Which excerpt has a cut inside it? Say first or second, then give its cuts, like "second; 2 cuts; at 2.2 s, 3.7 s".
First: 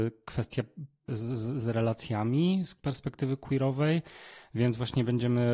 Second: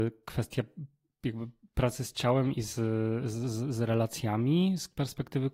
first; 1 cut; at 1.1 s